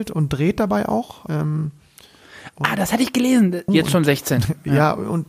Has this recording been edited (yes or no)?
yes